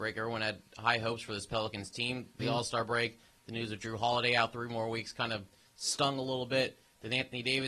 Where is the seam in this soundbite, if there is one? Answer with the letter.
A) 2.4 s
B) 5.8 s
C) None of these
A